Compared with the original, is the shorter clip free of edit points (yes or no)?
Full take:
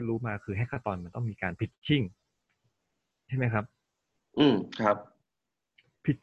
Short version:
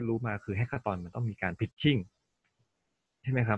no